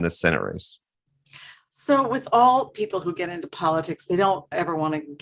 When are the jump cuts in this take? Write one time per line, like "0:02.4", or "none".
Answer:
none

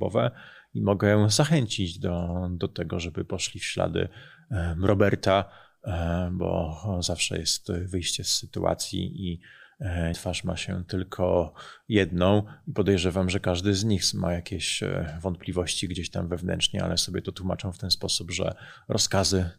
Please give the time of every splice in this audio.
0:10.1

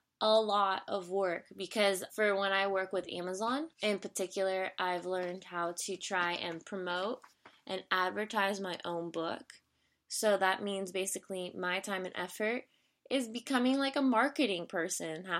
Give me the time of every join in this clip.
0:02.1
0:03.7

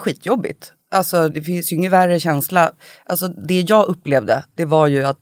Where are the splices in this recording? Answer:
0:01.3

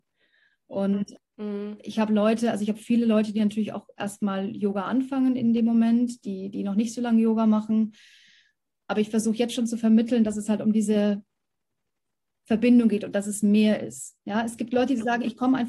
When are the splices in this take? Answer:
none

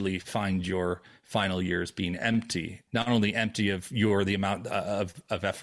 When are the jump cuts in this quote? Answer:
0:02.9

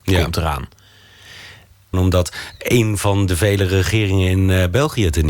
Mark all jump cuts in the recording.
0:01.9

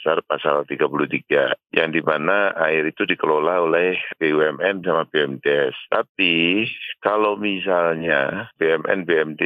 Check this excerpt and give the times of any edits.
0:04.8

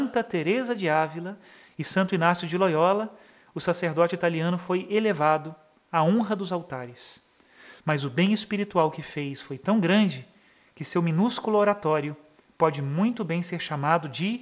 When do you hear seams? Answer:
0:07.8

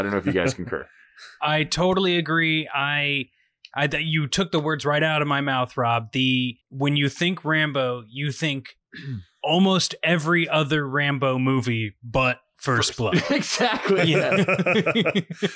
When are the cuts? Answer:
0:06.6

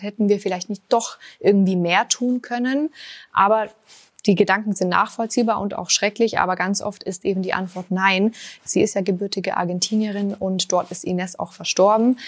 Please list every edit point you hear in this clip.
0:08.6

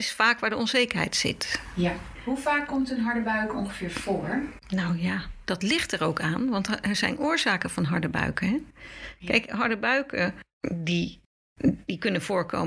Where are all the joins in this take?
none

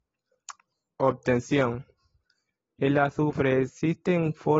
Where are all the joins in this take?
none

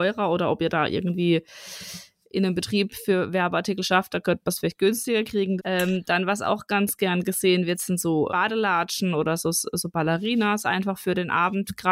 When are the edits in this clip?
0:05.6
0:08.3

